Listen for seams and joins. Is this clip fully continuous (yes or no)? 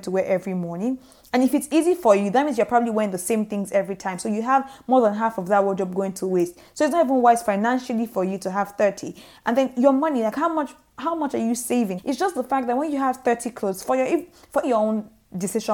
no